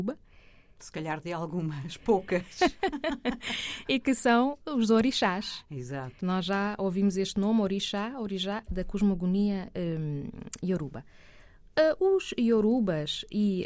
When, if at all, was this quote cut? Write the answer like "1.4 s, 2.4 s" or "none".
8.7 s